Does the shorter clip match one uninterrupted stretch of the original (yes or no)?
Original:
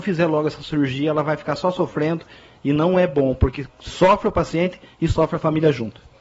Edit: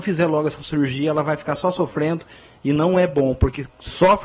yes